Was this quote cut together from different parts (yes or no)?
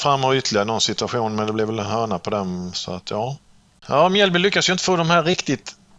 no